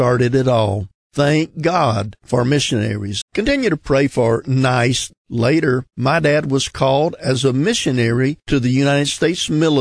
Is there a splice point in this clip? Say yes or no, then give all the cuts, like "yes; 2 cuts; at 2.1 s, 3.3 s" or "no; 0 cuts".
yes; 2 cuts; at 3.2 s, 5.2 s